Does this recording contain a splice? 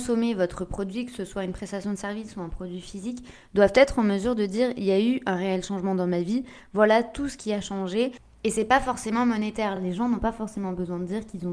no; 0 cuts

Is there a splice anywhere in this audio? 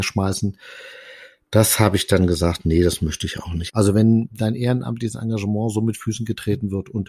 yes; 1 cut; at 3.7 s

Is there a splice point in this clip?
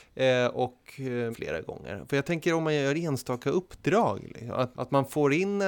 yes; 2 cuts; at 1.3 s, 4.7 s

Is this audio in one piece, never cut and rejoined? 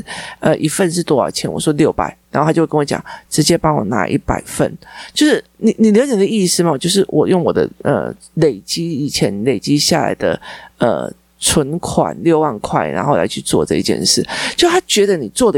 yes; 0 cuts

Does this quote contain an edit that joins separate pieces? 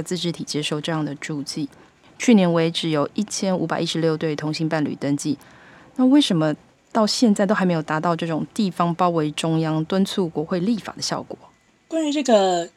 no; 0 cuts

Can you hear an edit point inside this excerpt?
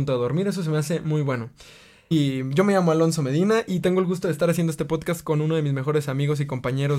yes; 1 cut; at 2.1 s

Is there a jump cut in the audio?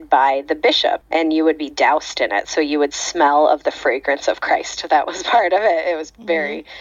no; 0 cuts

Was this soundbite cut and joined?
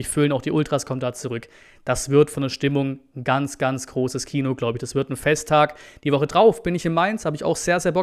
no; 0 cuts

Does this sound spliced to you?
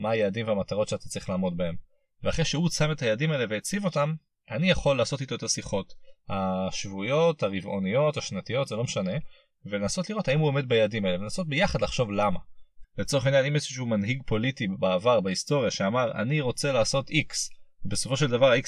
yes; 1 cut; at 12.8 s

